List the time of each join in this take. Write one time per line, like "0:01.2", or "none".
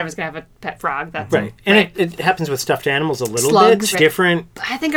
0:01.9
0:03.9